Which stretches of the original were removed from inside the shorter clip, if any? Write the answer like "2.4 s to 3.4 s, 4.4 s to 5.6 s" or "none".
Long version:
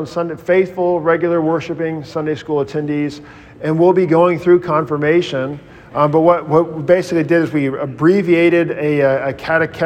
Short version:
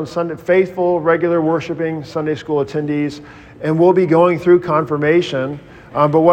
none